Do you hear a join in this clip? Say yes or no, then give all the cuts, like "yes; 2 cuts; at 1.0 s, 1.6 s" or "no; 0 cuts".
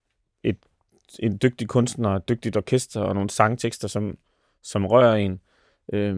no; 0 cuts